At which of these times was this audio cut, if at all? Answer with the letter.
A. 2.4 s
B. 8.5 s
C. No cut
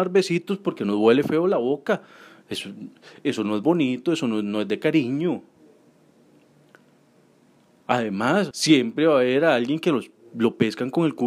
B